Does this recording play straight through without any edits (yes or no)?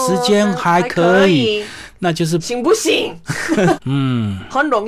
no